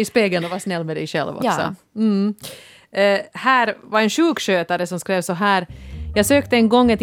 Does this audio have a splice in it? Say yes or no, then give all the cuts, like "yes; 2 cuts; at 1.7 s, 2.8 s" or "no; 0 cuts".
no; 0 cuts